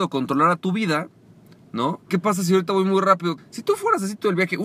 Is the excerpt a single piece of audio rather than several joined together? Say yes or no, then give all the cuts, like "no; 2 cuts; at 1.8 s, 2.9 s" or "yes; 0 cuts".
no; 2 cuts; at 2.1 s, 3.4 s